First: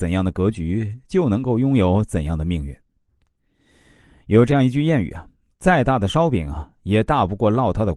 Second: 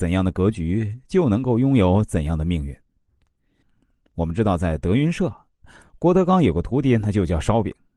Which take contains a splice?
second; 1 cut; at 3.6 s

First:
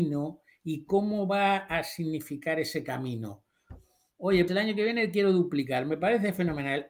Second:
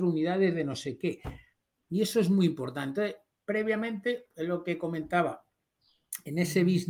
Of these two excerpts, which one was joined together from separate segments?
first; 1 cut; at 4.5 s

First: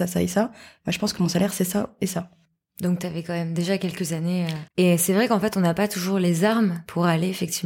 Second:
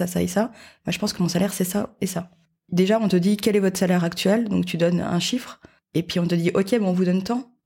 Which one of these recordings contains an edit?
first; 2 cuts; at 2.6 s, 4.7 s

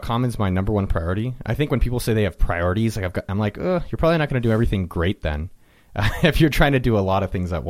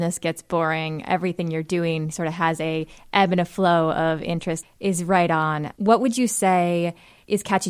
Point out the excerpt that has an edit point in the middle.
second; 1 cut; at 4.6 s

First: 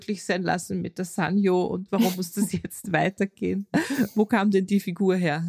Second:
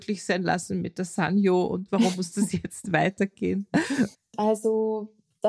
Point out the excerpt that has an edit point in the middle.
second; 1 cut; at 4.1 s

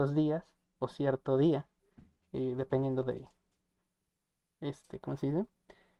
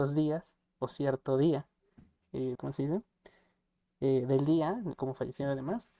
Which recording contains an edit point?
second; 2 cuts; at 2.6 s, 4.9 s

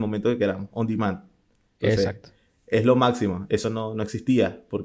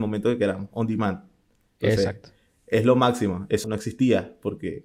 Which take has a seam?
second; 1 cut; at 3.6 s

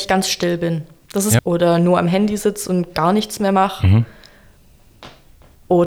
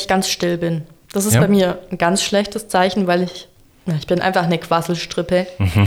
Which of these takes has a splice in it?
first; 1 cut; at 1.4 s

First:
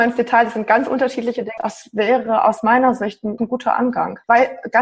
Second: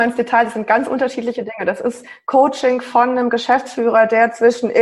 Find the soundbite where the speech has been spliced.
first; 2 cuts; at 1.6 s, 3.4 s

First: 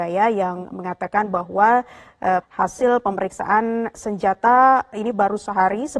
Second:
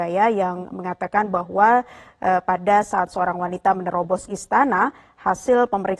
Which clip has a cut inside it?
first; 1 cut; at 2.4 s

